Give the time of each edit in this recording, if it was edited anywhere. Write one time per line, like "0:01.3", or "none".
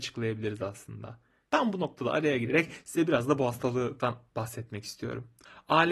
0:01.5